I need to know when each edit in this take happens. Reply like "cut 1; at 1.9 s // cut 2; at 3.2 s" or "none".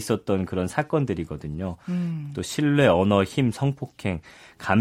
none